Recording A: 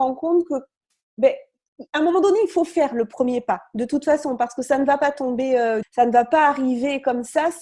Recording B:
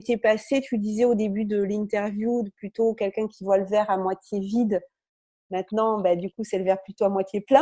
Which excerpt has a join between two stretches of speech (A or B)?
A